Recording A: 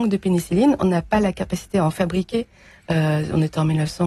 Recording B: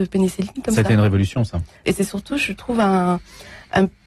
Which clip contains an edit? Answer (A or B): B